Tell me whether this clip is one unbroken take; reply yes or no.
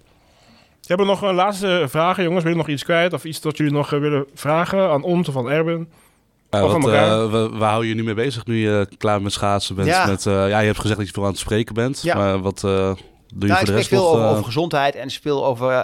yes